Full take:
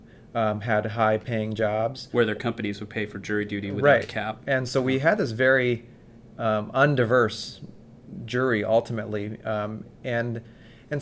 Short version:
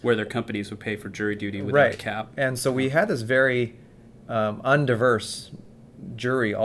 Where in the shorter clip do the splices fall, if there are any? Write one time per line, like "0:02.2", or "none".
none